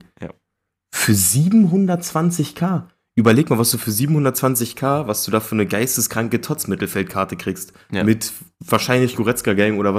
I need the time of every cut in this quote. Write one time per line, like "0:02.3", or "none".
none

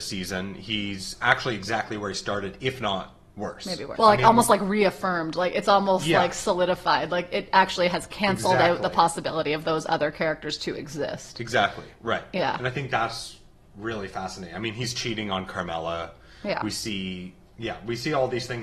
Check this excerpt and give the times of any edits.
0:04.0

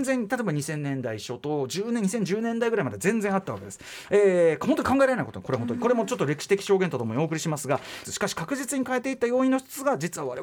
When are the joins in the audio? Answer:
0:08.0

